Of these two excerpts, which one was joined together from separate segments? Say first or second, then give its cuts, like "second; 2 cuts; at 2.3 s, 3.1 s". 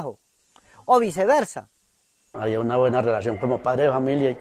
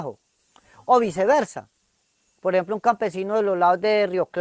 first; 1 cut; at 2.3 s